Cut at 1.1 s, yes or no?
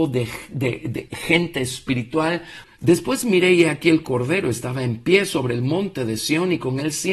yes